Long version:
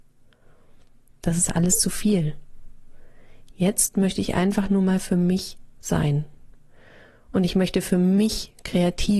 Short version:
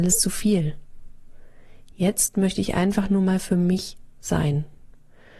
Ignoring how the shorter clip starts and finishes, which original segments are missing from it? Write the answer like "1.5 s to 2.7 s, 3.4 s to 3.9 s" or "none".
none